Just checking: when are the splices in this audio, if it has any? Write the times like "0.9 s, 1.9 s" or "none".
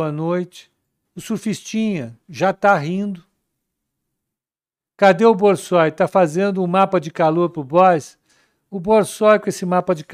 1.0 s